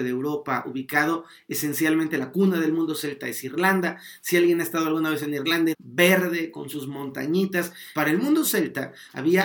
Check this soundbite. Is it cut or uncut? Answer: cut